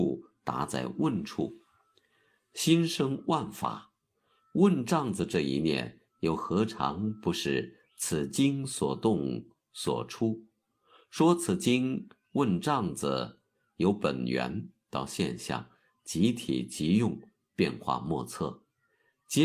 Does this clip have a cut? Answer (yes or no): no